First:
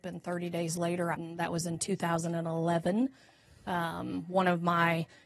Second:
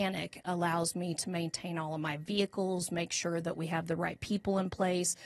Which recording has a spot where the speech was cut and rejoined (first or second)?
first